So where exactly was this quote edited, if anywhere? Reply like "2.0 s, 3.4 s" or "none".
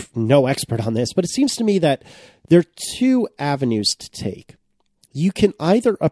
none